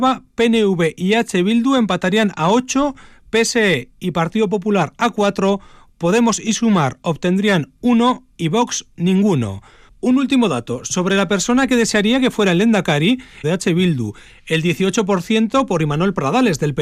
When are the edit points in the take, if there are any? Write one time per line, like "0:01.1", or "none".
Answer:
0:13.4